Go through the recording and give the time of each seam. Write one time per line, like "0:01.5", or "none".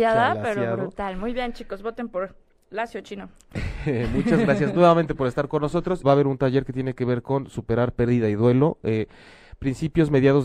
0:06.0